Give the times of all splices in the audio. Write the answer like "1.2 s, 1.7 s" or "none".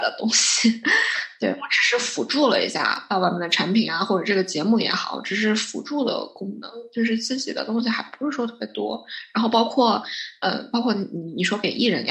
none